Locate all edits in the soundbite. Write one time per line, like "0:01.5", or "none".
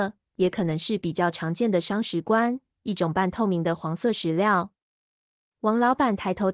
none

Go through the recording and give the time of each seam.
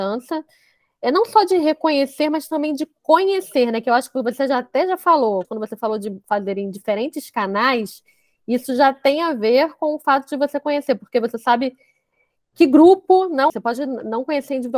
0:05.4
0:13.5

